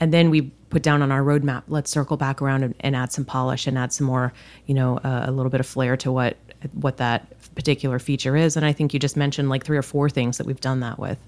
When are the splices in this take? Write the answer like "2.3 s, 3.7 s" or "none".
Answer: none